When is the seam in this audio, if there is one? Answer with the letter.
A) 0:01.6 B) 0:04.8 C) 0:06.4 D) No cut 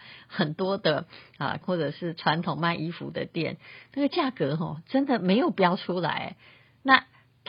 A